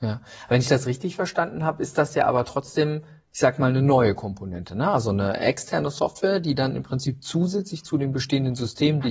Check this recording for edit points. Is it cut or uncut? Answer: uncut